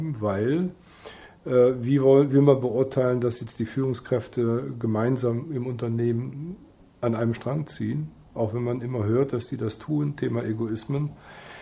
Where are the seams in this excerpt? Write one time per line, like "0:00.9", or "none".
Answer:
none

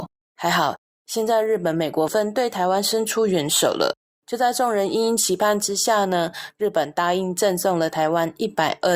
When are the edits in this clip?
0:02.1

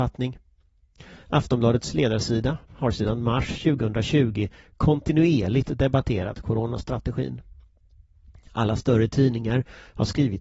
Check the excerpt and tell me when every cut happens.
0:01.2
0:02.7

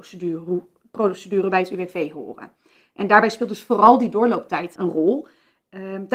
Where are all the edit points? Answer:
0:04.8

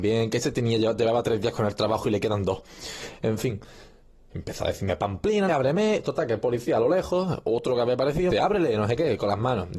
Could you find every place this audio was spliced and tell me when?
0:05.5
0:08.3

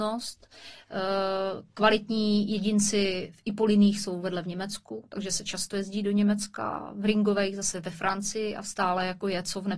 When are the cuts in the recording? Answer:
none

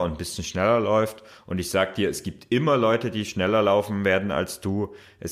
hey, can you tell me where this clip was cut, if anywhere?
none

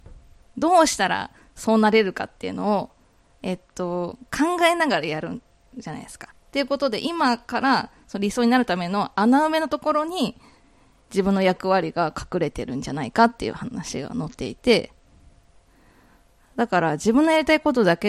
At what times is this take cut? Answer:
0:06.3

